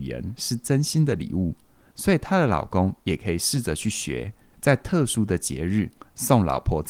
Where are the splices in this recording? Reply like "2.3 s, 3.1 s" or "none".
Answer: 4.5 s